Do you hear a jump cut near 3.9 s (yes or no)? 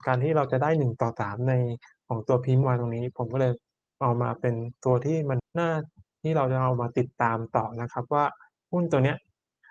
no